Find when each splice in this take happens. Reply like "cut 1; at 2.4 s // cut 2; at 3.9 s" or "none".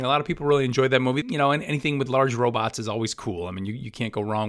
cut 1; at 1.2 s